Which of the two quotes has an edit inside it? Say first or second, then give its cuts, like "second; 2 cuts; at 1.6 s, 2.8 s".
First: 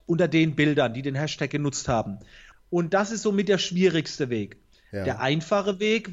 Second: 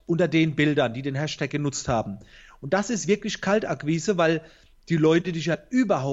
first; 1 cut; at 2.5 s